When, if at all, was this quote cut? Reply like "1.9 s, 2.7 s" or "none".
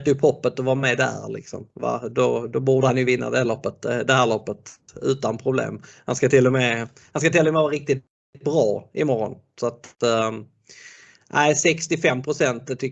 none